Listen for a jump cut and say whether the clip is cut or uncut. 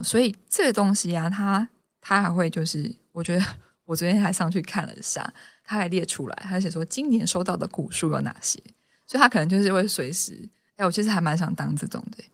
uncut